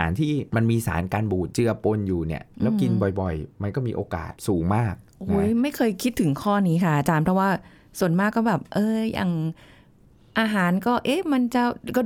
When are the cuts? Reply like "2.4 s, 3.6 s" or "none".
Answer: none